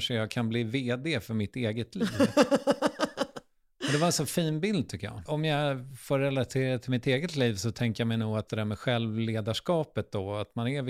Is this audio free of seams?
no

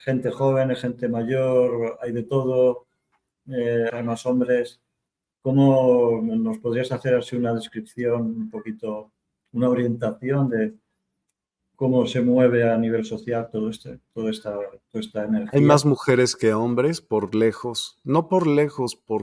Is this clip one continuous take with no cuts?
no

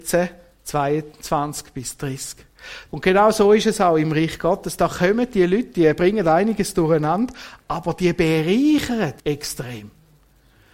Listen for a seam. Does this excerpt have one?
yes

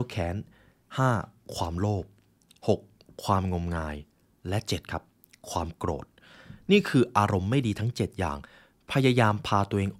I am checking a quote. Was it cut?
no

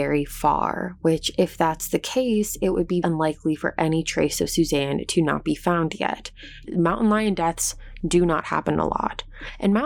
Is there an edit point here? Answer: yes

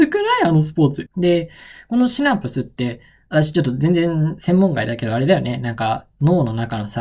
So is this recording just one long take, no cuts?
no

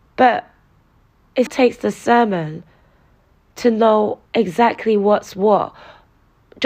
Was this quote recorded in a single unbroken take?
no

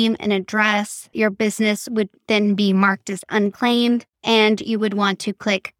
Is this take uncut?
no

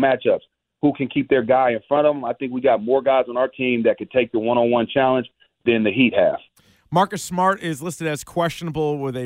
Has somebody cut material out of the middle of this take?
no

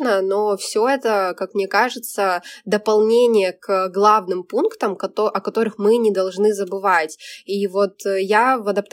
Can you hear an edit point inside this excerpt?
no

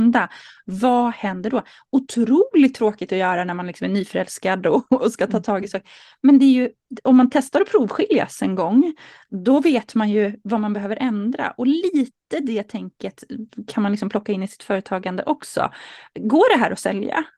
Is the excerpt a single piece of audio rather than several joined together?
yes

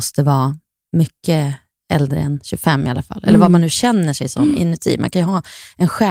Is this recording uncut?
yes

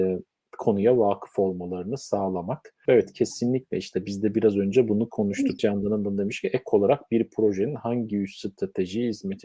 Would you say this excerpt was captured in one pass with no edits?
no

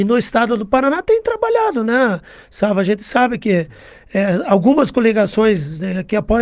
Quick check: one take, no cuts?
yes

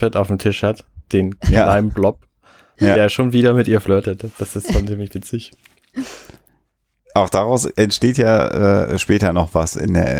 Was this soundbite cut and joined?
no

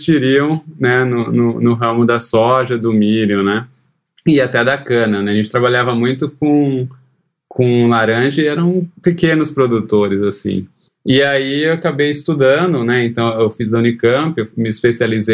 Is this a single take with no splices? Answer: no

